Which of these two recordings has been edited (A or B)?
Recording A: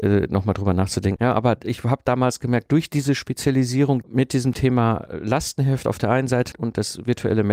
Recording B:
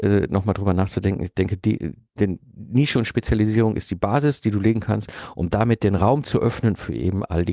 A